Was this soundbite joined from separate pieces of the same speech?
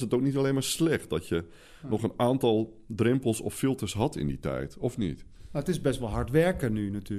no; 0 cuts

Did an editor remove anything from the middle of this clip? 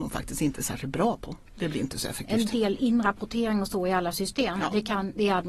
yes; 1 cut; at 1.5 s

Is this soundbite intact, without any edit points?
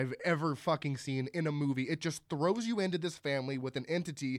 yes; 0 cuts

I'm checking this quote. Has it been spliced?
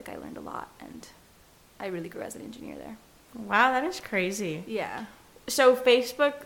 no; 0 cuts

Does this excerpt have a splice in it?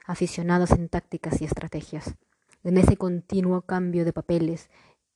yes; 1 cut; at 2.5 s

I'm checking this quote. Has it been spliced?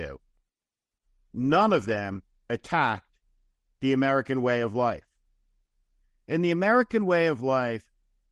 no; 0 cuts

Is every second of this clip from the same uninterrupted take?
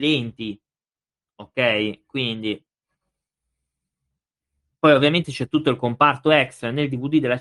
yes; 0 cuts

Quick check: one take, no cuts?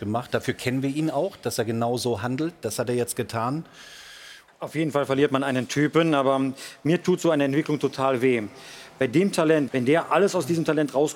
no; 2 cuts; at 4.5 s, 9.7 s

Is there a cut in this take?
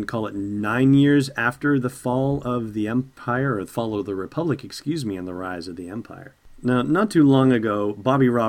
no; 0 cuts

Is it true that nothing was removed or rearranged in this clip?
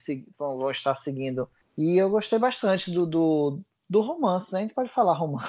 no; 1 cut; at 1.6 s

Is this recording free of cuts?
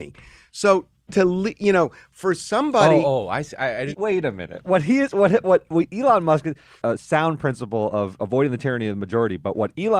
no; 2 cuts; at 3.9 s, 6.8 s

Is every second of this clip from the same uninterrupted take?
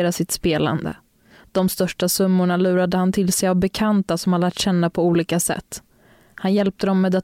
yes; 0 cuts

